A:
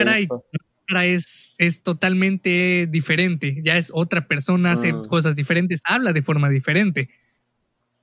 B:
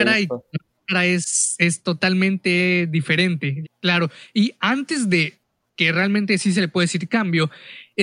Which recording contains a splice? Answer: B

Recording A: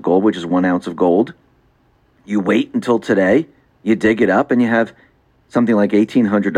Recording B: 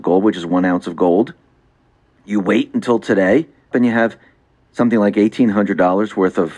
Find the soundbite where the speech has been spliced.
B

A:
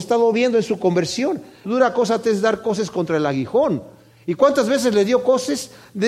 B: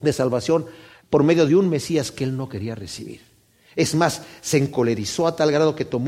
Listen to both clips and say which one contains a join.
A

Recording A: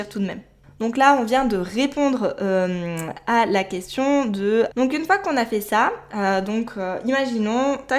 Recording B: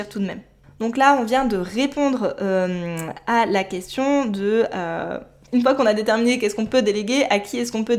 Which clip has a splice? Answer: A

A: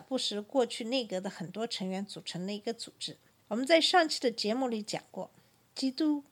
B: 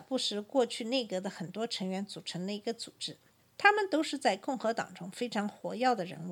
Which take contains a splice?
A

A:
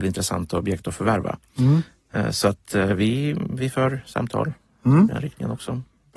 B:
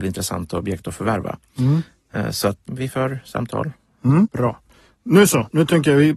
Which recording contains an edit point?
B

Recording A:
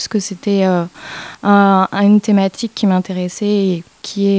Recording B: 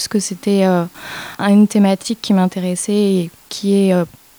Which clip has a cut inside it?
B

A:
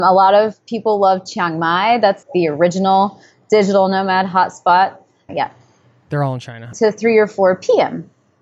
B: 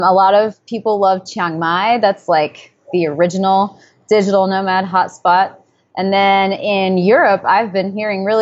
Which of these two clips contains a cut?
A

